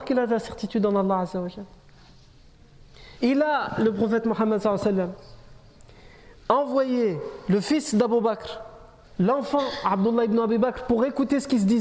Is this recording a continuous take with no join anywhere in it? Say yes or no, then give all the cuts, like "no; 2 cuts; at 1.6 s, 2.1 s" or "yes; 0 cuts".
no; 2 cuts; at 3.1 s, 9.0 s